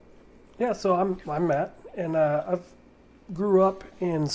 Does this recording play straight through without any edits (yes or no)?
yes